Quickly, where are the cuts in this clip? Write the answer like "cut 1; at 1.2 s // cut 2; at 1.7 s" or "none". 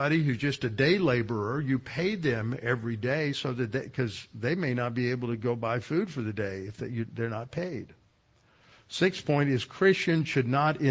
none